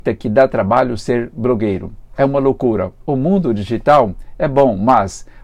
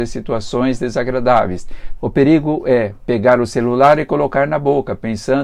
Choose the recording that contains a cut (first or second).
second